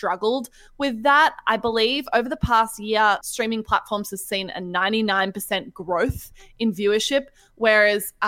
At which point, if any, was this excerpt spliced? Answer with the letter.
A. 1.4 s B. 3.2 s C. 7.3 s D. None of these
B